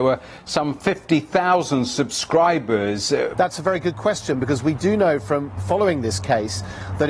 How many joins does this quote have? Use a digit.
2